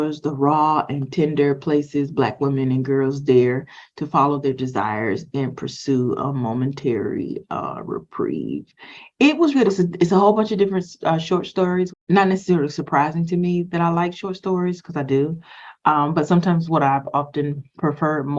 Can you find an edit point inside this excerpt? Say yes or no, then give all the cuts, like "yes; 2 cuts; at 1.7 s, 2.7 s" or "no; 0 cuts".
yes; 2 cuts; at 9.5 s, 11.9 s